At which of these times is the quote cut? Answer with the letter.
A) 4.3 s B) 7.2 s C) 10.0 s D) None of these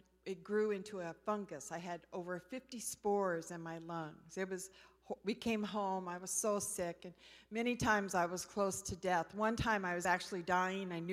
D